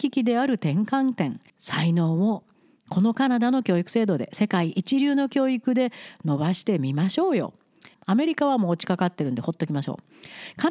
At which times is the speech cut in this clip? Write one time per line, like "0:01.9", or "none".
0:01.5
0:07.9